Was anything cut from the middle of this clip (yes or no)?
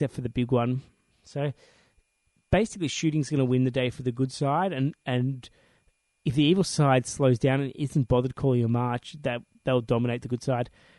no